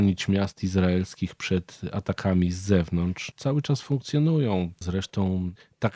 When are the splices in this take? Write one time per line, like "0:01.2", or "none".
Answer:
0:03.3
0:04.8